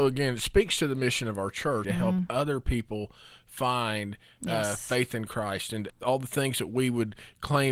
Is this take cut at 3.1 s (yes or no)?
no